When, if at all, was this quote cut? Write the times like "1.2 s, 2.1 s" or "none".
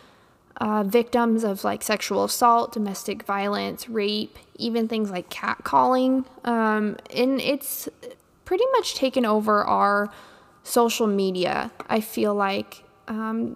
none